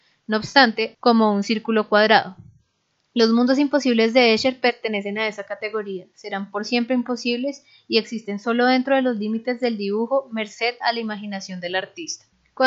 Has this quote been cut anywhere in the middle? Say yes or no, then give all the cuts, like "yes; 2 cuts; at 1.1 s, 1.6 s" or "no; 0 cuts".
yes; 1 cut; at 0.9 s